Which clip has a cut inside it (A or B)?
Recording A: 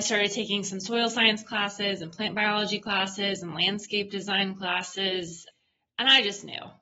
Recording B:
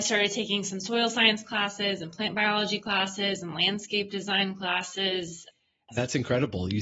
B